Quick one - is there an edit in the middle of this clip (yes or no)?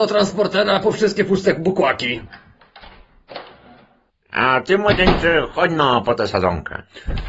no